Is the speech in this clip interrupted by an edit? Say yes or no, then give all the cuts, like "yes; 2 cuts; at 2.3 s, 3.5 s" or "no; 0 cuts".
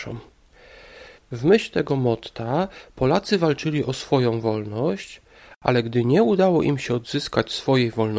no; 0 cuts